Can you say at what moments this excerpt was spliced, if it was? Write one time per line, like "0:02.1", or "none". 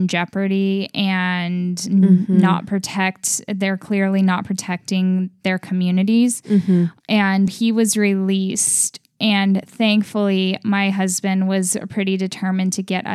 0:07.5